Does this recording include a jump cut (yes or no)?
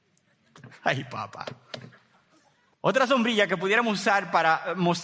yes